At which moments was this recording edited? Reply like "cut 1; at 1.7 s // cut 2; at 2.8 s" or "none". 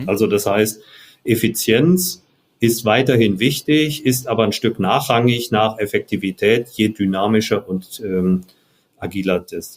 none